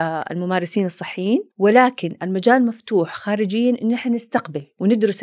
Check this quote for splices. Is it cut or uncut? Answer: cut